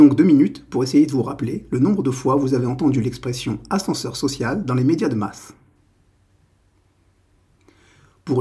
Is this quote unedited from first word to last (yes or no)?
yes